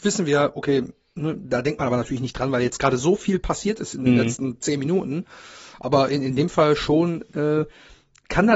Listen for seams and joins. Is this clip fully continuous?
yes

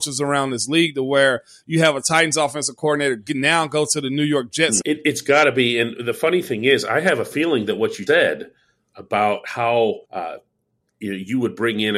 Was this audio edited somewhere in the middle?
yes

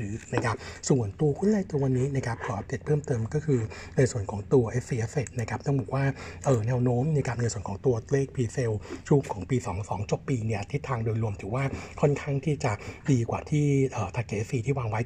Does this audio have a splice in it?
no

